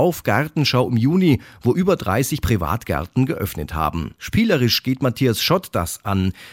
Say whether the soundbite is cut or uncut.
cut